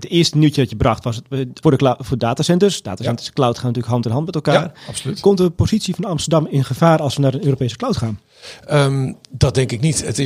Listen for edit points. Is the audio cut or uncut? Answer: cut